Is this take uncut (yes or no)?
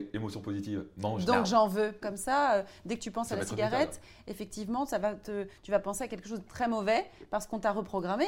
no